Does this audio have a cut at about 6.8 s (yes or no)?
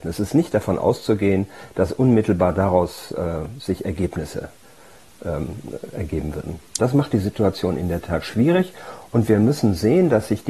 yes